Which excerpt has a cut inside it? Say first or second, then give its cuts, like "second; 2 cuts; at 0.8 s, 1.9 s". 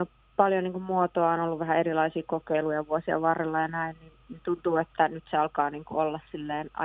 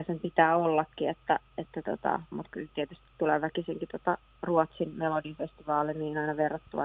second; 1 cut; at 2.3 s